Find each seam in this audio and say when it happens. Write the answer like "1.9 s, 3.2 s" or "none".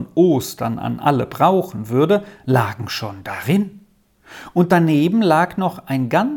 none